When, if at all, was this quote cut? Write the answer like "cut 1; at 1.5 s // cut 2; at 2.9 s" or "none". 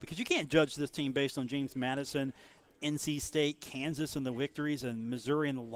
none